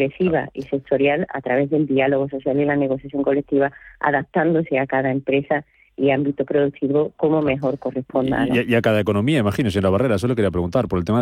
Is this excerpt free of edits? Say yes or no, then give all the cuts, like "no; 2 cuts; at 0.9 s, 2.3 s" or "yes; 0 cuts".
yes; 0 cuts